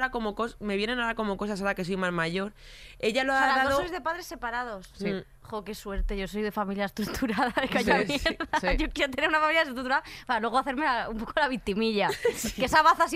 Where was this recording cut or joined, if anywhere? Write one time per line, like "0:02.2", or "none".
none